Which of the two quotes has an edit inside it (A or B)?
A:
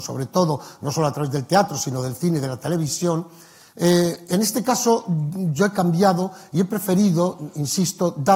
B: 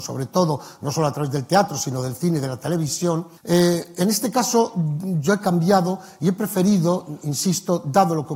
B